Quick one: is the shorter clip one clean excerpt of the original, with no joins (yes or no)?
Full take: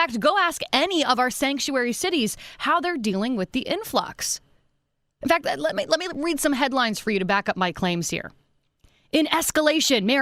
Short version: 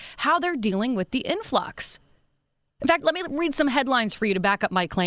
no